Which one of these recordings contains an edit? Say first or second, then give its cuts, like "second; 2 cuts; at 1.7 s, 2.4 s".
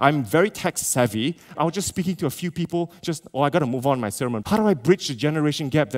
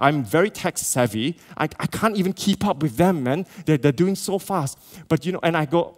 first; 2 cuts; at 1.5 s, 4.4 s